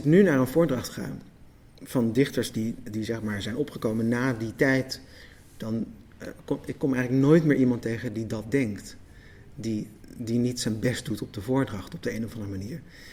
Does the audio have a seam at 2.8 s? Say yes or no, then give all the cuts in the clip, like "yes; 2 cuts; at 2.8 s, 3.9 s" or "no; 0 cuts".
yes; 1 cut; at 2.8 s